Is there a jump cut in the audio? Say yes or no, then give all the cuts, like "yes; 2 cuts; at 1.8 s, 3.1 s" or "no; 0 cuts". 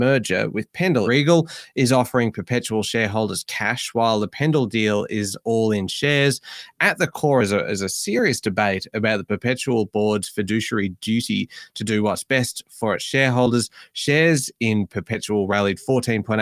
yes; 1 cut; at 1.0 s